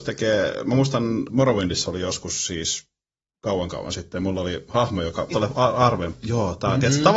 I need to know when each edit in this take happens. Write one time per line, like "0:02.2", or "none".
0:01.3
0:05.3